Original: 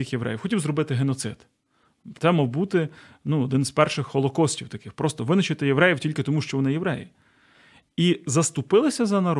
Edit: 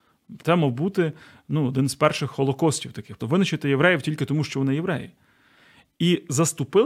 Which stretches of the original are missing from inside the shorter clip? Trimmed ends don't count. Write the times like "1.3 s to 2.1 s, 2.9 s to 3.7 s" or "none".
5.0 s to 5.2 s